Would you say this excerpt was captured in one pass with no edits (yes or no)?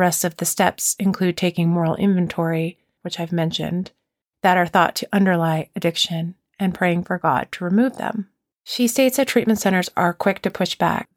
no